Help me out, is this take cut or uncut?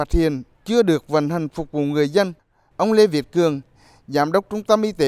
cut